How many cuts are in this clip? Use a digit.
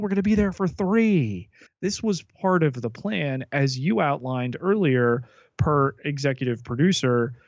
1